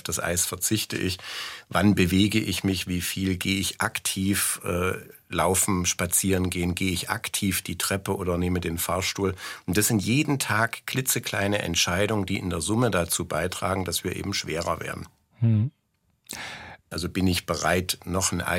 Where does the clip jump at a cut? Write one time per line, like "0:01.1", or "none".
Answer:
0:16.9